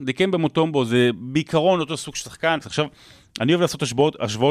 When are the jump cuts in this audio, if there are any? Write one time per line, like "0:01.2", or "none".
0:02.6